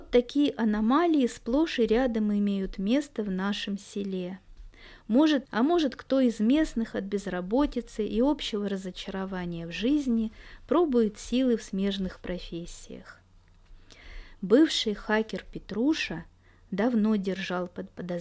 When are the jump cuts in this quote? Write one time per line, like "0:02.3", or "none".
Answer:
0:05.4

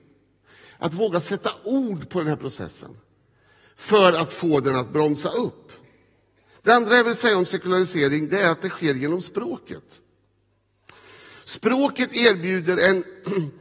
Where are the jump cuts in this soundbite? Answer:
0:06.5

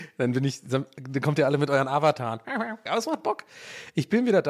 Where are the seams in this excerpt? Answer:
0:02.9

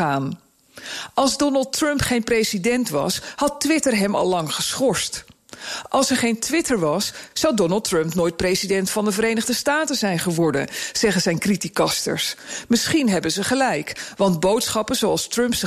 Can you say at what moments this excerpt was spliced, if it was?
none

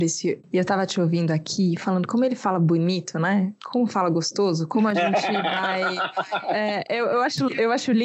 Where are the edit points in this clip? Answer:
none

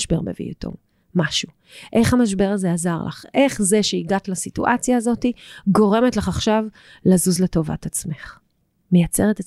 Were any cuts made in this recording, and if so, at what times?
none

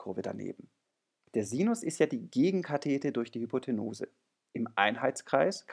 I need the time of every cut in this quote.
0:01.3

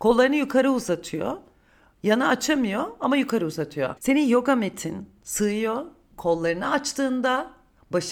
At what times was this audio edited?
0:04.0

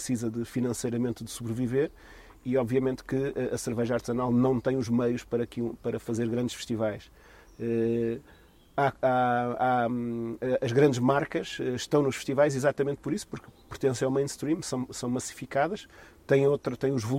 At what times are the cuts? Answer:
none

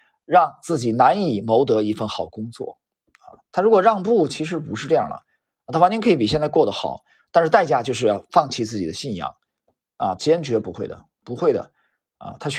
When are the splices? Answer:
0:10.2

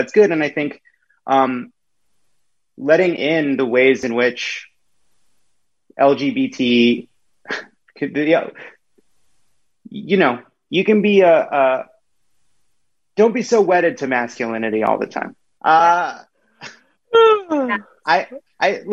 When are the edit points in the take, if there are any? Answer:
0:10.7
0:15.6

